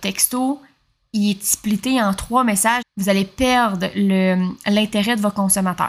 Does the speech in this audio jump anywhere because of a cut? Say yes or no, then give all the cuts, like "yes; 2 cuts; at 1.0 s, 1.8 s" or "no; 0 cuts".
yes; 1 cut; at 2.8 s